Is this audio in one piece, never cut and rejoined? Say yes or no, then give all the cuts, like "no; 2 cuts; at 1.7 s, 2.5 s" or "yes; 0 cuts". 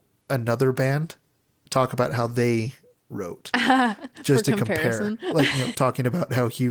no; 1 cut; at 5.7 s